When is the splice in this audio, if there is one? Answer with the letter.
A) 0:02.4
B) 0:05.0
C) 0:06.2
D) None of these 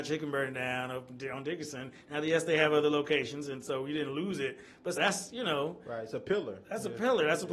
B